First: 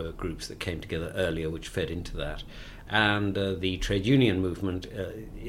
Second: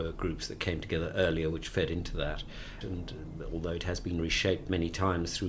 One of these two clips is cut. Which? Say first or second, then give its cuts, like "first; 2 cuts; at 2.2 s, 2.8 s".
second; 1 cut; at 2.8 s